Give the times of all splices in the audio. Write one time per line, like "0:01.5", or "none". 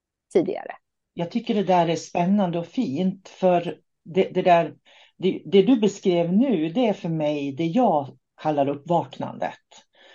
none